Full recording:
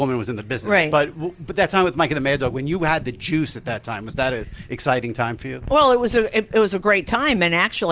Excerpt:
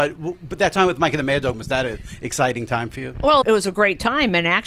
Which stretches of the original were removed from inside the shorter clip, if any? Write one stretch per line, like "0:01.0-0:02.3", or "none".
0:02.5-0:04.0
0:05.9-0:06.5